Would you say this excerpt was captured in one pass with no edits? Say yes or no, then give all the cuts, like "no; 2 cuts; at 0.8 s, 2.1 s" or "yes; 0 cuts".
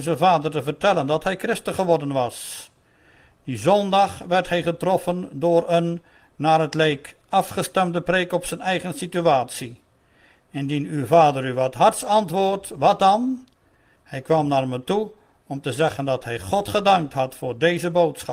yes; 0 cuts